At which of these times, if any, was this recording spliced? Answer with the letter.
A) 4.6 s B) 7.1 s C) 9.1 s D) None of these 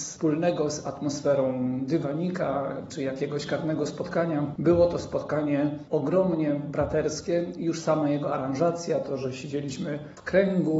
D